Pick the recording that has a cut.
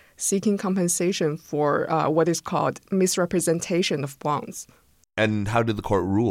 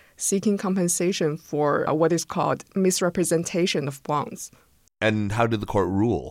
second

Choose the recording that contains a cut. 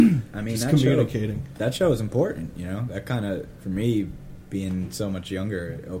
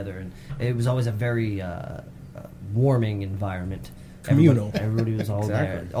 second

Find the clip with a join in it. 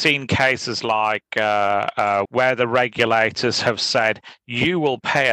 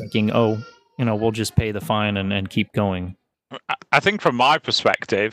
first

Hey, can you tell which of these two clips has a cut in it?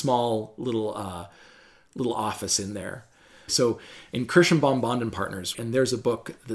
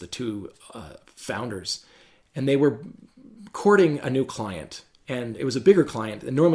first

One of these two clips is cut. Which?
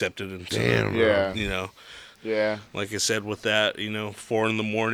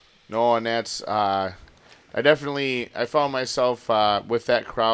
first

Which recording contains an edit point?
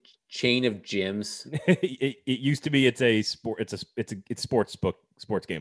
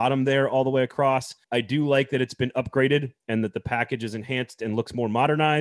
second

